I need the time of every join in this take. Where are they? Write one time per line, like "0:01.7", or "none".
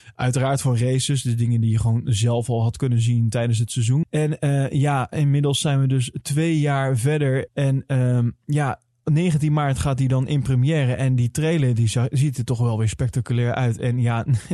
0:04.0
0:07.5